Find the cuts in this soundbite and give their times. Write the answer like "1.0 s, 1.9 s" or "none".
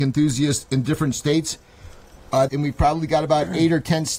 2.5 s